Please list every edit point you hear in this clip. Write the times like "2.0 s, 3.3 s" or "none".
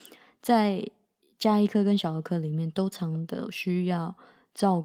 2.9 s